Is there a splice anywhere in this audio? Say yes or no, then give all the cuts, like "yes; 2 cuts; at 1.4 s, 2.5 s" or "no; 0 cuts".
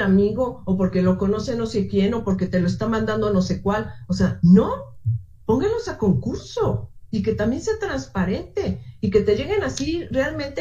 no; 0 cuts